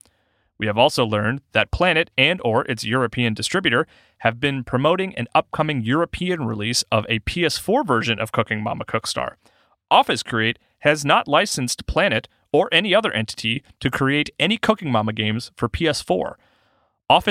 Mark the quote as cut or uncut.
uncut